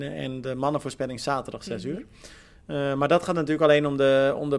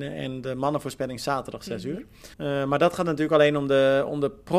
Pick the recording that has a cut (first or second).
second